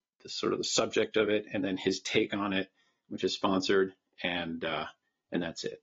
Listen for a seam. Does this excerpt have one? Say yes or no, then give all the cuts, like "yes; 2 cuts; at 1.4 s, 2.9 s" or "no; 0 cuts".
no; 0 cuts